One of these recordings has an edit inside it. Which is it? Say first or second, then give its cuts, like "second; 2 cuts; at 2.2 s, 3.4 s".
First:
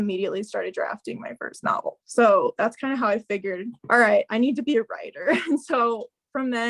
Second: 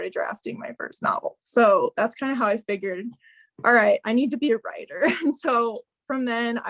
first; 1 cut; at 3.8 s